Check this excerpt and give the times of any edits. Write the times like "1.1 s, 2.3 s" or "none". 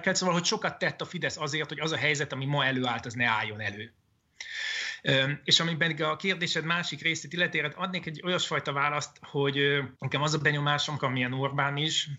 9.9 s, 11.0 s